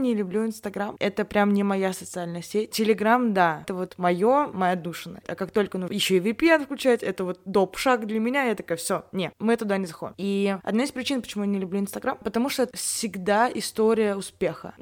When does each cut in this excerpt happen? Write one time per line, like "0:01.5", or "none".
0:05.2